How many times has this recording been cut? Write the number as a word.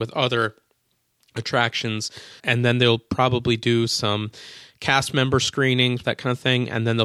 two